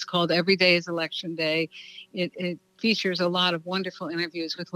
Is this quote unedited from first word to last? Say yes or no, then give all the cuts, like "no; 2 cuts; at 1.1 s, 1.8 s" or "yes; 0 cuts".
yes; 0 cuts